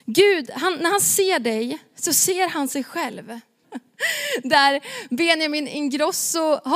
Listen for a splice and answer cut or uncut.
cut